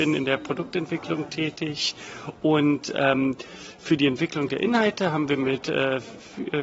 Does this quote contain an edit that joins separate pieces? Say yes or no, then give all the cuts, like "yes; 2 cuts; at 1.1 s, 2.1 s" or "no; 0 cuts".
no; 0 cuts